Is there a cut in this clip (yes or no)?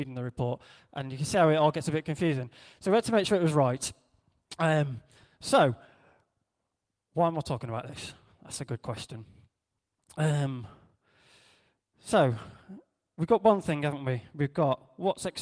no